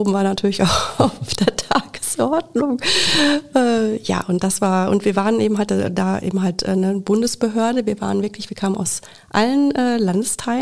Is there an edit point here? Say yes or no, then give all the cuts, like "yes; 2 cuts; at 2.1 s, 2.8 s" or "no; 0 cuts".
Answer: no; 0 cuts